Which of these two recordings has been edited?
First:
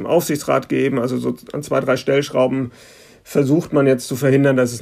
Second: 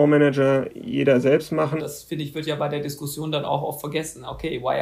second; 1 cut; at 1.8 s

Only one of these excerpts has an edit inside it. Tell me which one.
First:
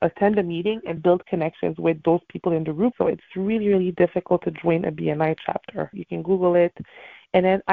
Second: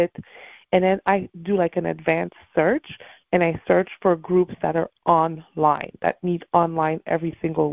first; 3 cuts; at 1.0 s, 2.9 s, 5.9 s

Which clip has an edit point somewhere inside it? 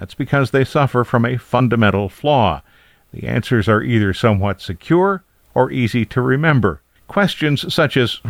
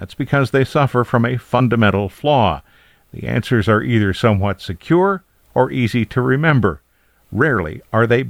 first; 1 cut; at 7.0 s

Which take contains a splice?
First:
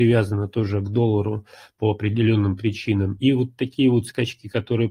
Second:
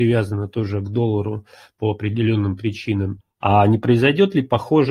second; 1 cut; at 3.2 s

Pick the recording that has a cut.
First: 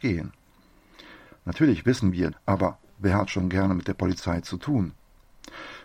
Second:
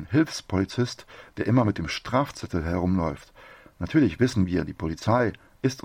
first; 2 cuts; at 1.3 s, 2.3 s

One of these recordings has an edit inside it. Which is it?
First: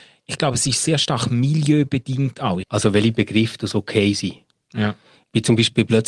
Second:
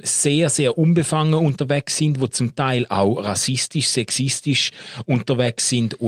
first; 1 cut; at 2.6 s

